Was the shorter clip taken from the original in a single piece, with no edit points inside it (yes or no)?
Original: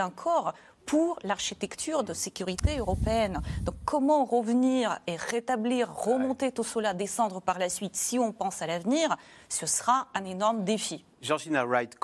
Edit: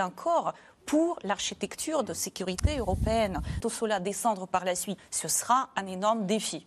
no